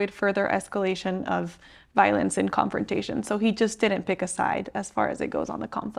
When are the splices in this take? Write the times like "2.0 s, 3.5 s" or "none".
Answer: none